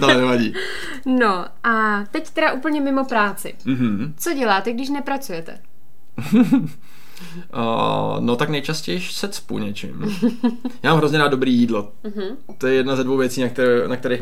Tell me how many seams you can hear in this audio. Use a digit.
0